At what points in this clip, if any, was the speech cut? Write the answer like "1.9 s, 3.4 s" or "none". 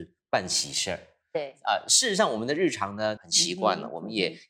3.2 s